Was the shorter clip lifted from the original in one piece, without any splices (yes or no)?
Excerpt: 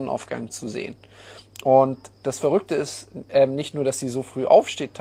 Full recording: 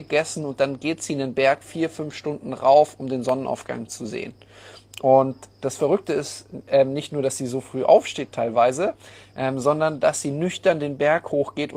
yes